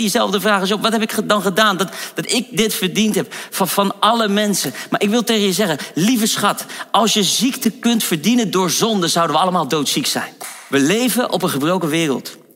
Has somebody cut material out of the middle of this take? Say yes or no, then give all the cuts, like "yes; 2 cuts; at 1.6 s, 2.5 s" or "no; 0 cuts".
no; 0 cuts